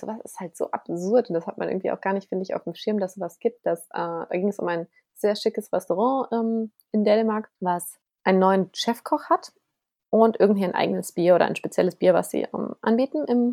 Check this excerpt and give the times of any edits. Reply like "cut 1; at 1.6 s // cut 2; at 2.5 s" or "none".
cut 1; at 7.6 s